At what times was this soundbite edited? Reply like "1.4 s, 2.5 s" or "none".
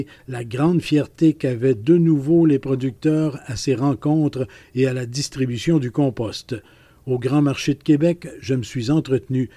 none